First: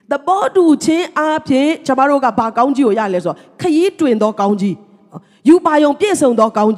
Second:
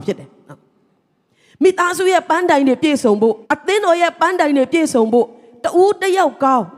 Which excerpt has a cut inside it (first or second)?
second